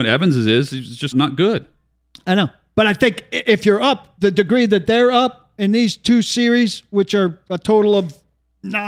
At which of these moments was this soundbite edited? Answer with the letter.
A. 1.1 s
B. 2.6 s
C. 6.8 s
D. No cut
A